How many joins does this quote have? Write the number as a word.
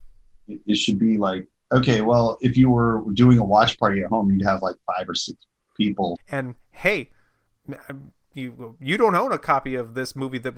one